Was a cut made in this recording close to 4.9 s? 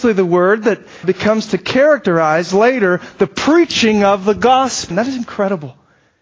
yes; 2 cuts; at 1.0 s, 4.9 s

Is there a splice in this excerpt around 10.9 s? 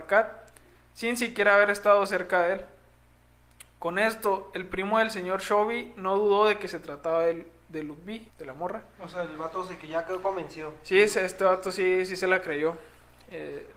no; 1 cut; at 8.3 s

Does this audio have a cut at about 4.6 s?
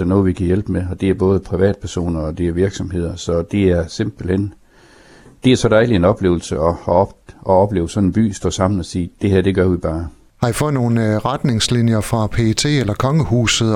no; 1 cut; at 10.3 s

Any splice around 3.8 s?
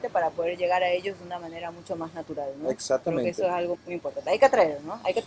yes; 1 cut; at 3.8 s

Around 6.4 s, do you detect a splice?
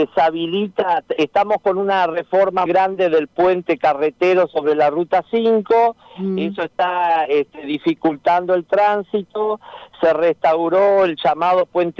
no; 1 cut; at 2.7 s

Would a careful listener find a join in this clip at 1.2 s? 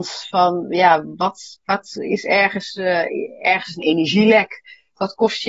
no; 0 cuts

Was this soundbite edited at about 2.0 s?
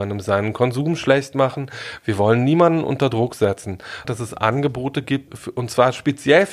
no; 2 cuts; at 4.0 s, 5.3 s

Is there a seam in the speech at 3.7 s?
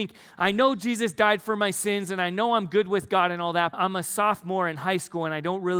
yes; 1 cut; at 3.7 s

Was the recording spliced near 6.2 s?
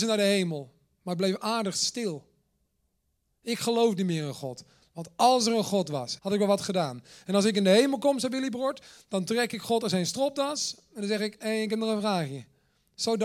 yes; 1 cut; at 6.2 s

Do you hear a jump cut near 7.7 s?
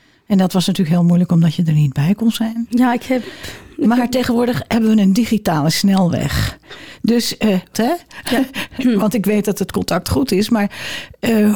yes; 1 cut; at 7.7 s

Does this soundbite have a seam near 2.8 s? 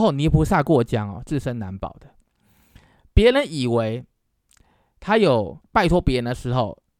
no; 0 cuts

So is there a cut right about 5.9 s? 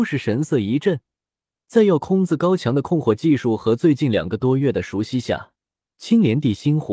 no; 1 cut; at 1.5 s

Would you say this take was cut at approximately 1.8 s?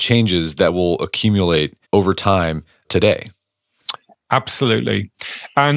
yes; 1 cut; at 1.8 s

